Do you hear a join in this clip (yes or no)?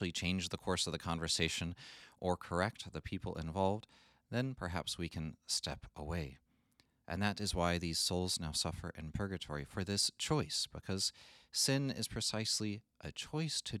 yes